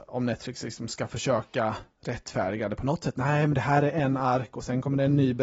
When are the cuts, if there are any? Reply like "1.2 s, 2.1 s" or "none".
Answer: none